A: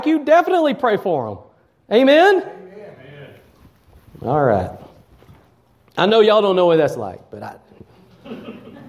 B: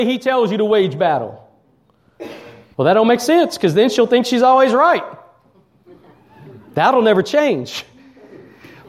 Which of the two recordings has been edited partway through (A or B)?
B